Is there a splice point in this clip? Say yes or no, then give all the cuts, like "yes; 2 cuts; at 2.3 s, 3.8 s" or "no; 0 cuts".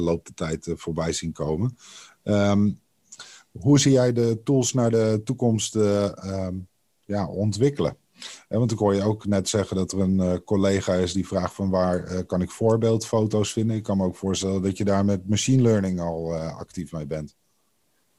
yes; 1 cut; at 2.1 s